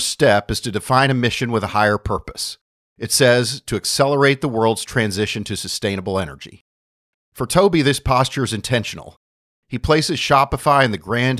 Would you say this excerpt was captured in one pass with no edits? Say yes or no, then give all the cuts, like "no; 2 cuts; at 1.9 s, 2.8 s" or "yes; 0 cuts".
no; 2 cuts; at 2.8 s, 7.1 s